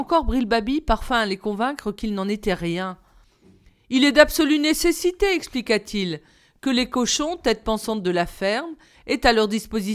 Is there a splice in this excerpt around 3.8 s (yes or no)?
no